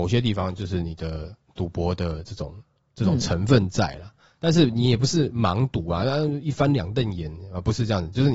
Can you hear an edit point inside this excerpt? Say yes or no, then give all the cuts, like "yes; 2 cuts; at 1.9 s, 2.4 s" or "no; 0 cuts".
no; 0 cuts